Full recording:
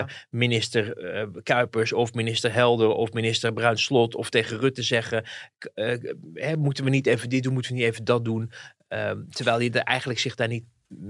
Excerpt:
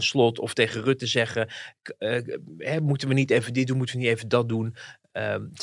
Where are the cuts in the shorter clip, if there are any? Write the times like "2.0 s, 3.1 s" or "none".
none